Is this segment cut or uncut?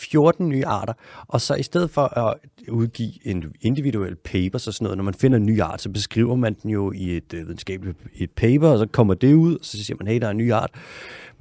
uncut